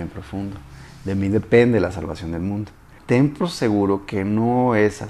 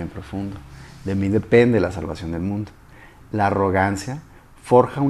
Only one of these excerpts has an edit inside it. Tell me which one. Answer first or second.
first